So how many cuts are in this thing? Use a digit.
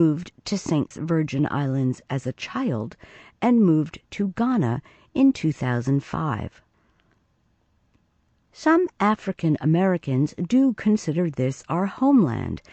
1